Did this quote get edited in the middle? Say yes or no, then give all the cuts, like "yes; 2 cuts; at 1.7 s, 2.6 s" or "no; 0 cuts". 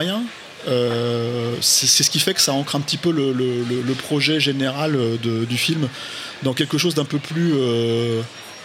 no; 0 cuts